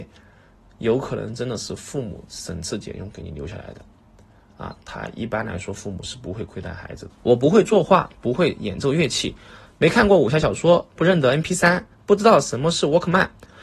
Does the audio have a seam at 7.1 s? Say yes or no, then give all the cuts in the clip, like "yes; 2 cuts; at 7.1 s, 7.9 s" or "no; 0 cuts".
yes; 2 cuts; at 7.1 s, 9.7 s